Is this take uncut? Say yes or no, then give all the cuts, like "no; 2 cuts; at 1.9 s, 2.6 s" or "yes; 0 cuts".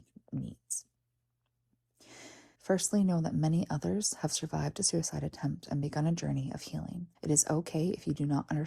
no; 2 cuts; at 2.6 s, 7.1 s